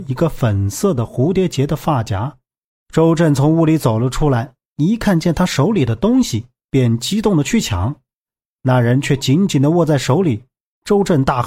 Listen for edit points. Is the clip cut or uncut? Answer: cut